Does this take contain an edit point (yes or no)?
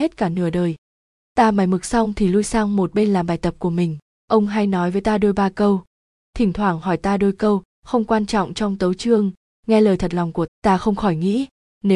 yes